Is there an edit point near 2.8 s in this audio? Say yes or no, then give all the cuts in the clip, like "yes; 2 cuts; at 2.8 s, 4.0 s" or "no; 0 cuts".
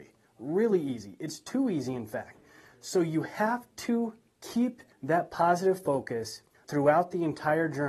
no; 0 cuts